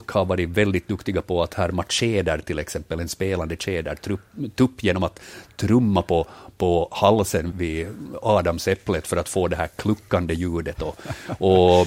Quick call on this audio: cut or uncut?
cut